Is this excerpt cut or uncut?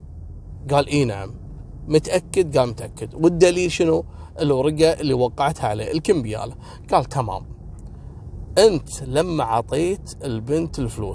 uncut